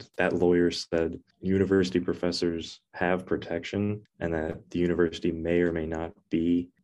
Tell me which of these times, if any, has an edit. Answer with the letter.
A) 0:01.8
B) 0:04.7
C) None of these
B